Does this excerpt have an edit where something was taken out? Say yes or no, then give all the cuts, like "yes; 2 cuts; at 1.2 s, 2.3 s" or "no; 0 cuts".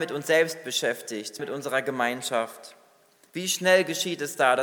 yes; 1 cut; at 1.4 s